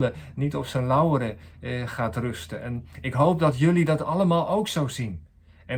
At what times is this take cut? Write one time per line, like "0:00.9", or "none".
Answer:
none